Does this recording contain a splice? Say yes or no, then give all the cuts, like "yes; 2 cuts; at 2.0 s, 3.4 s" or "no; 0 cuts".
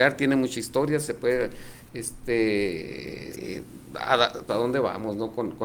yes; 2 cuts; at 3.3 s, 4.5 s